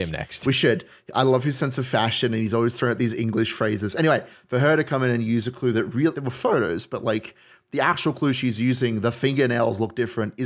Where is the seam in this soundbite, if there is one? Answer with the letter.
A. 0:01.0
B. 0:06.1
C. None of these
B